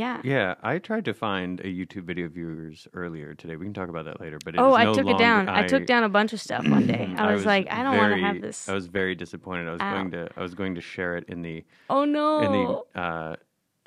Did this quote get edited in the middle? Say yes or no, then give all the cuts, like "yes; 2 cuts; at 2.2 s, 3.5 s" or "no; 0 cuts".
no; 0 cuts